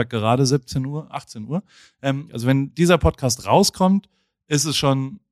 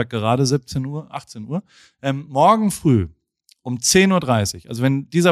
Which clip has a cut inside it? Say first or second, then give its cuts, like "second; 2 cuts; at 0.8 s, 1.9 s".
first; 1 cut; at 2.3 s